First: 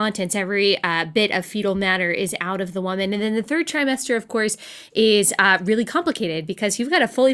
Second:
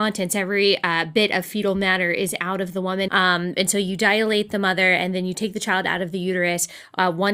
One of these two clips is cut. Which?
second; 1 cut; at 3.1 s

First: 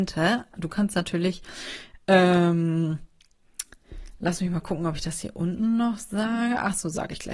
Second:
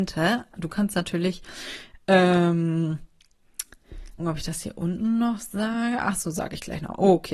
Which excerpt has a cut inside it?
second; 1 cut; at 4.2 s

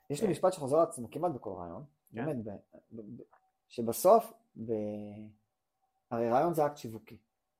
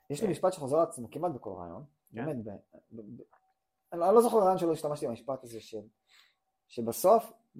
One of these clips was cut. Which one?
first; 1 cut; at 3.5 s

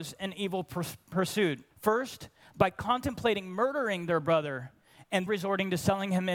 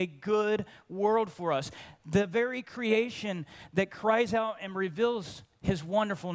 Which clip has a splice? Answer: first; 2 cuts; at 1.7 s, 5.3 s

